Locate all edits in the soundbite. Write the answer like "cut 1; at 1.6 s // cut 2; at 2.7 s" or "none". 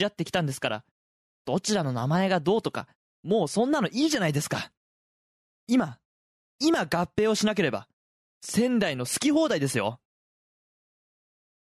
none